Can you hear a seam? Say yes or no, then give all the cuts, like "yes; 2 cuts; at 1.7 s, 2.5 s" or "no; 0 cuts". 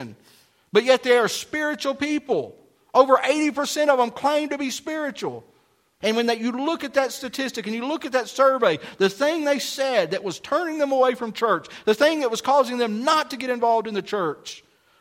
yes; 1 cut; at 6.0 s